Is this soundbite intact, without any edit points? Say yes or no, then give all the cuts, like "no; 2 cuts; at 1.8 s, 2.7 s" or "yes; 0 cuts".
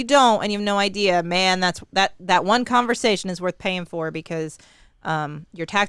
yes; 0 cuts